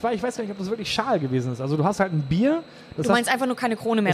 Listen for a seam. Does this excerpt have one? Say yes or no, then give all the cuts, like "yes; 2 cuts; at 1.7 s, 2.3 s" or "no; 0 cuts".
no; 0 cuts